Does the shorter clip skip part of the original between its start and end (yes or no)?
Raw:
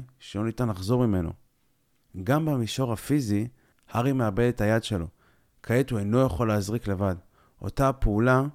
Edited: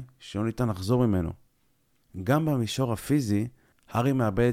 no